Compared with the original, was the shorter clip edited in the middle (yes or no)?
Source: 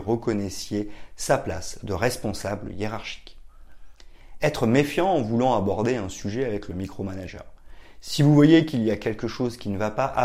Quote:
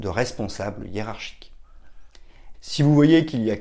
yes